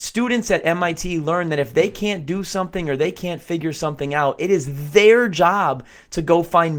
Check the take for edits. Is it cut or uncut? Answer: uncut